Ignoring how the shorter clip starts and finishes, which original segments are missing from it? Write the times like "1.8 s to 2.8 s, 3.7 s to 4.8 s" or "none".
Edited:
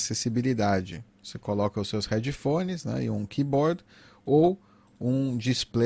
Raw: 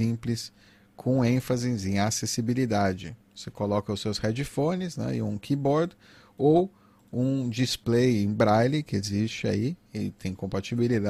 none